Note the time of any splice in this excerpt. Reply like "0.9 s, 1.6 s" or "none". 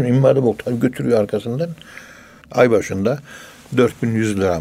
2.4 s